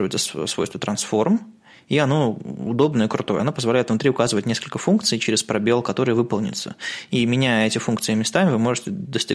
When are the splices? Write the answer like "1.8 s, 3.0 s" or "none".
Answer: none